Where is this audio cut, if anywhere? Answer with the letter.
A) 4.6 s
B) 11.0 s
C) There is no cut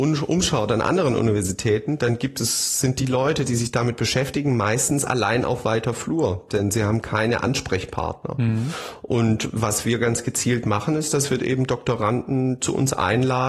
C